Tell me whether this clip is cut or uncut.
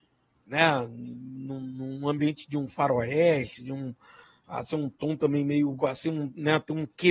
cut